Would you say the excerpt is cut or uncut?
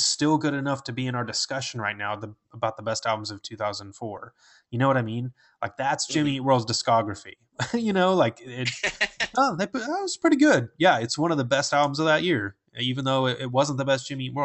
uncut